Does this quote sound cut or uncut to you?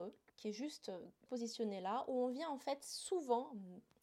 cut